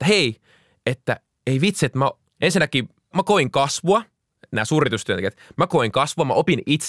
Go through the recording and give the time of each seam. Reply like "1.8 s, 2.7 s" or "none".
3.1 s